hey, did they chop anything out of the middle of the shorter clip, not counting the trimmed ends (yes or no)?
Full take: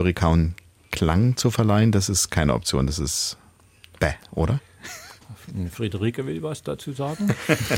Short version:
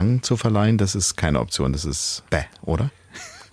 yes